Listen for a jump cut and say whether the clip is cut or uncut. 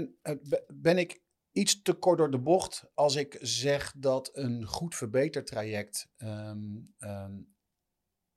uncut